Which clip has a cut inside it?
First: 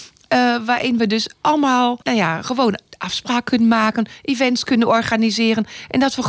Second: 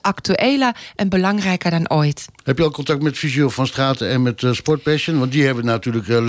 first; 1 cut; at 2.0 s

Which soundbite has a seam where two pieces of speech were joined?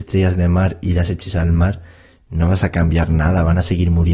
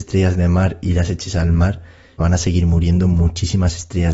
second; 1 cut; at 2.2 s

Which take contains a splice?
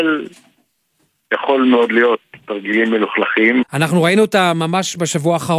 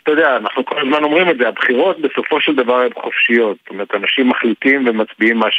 first; 1 cut; at 3.6 s

